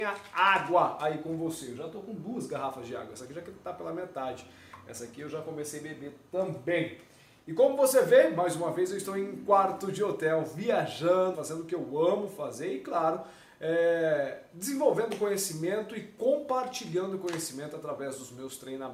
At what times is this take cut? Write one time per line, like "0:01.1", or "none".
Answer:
0:11.3